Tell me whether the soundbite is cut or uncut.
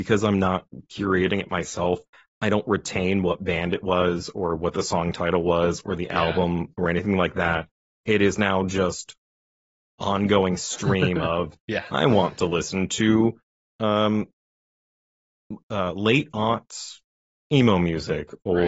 uncut